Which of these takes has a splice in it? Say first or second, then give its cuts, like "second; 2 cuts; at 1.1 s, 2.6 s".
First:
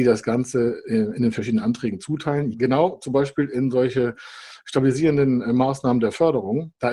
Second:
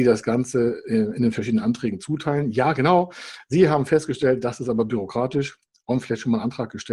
first; 1 cut; at 2.5 s